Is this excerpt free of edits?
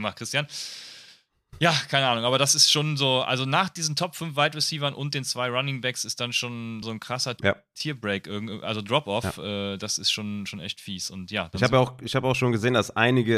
no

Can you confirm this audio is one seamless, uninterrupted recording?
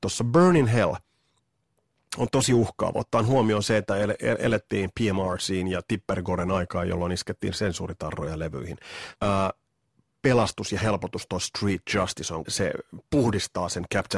no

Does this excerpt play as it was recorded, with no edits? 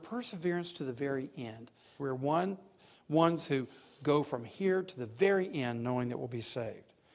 no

